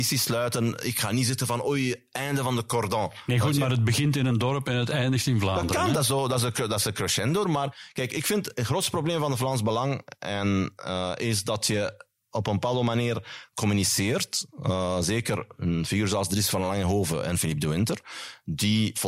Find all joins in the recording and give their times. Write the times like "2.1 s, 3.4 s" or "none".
7.4 s